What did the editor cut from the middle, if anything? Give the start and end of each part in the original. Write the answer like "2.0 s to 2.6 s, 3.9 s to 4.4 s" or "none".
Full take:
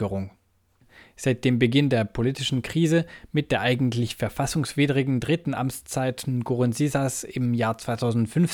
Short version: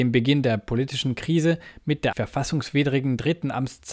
3.6 s to 4.2 s